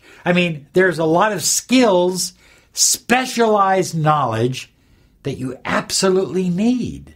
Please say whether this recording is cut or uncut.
uncut